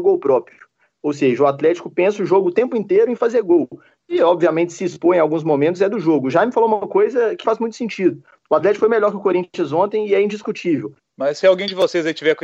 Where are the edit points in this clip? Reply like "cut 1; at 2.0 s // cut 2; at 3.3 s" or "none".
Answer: cut 1; at 7.4 s // cut 2; at 11.0 s

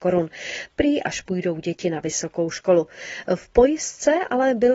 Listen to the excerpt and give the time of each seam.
cut 1; at 1.0 s

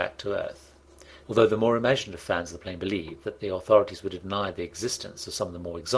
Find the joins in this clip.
cut 1; at 1.2 s // cut 2; at 3.2 s

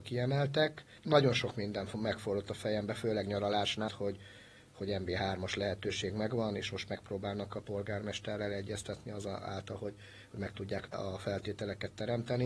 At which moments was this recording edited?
cut 1; at 3.9 s

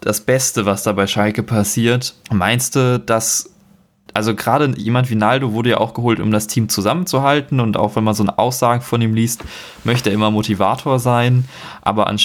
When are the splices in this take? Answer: cut 1; at 2.2 s

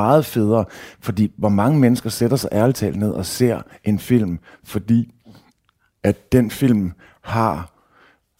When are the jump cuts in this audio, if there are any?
none

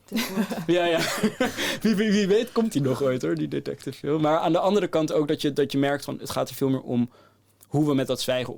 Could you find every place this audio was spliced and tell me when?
none

